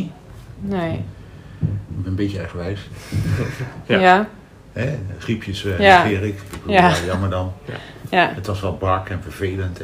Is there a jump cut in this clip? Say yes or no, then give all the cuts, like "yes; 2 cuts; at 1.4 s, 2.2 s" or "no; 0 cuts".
yes; 1 cut; at 3.8 s